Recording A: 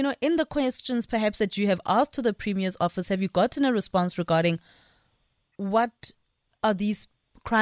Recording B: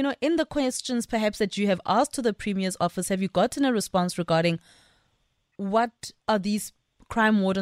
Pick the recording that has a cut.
B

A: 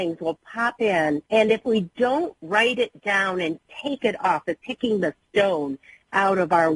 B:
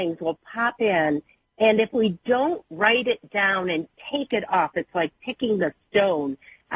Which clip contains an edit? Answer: A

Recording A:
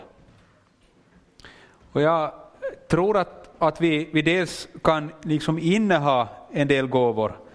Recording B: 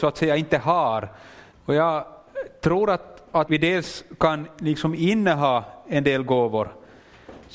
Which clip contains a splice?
B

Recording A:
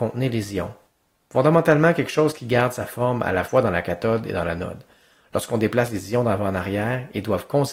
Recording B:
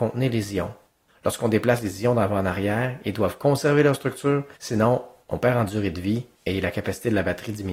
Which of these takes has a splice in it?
B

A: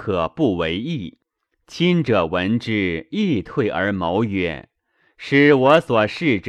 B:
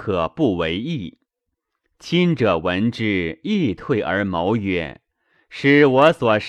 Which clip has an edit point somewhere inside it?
A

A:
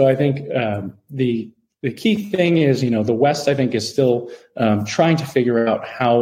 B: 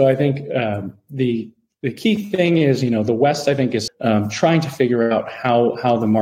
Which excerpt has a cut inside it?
B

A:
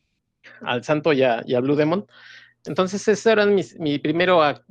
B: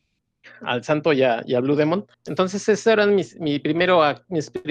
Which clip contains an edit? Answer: B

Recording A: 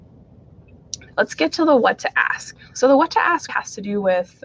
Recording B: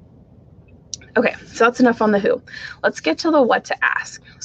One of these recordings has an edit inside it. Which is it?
A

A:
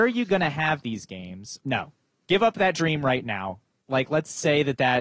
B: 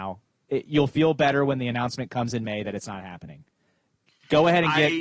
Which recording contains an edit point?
A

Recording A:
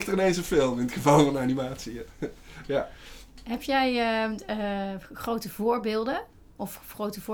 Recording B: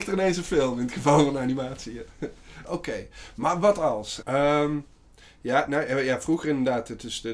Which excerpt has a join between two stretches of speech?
B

